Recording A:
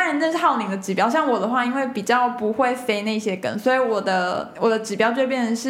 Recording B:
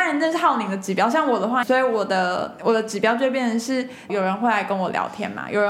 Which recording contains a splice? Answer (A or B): B